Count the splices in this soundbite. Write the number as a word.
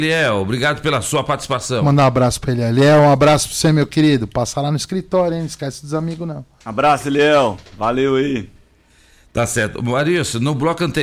zero